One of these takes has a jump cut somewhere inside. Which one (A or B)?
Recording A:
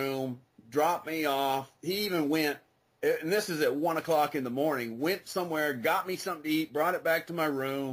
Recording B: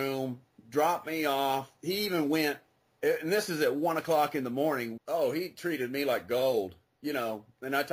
B